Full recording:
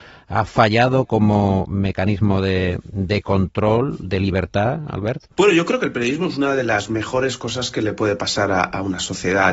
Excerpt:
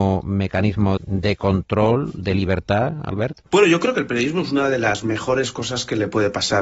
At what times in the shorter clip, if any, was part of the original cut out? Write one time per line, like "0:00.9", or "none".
0:01.0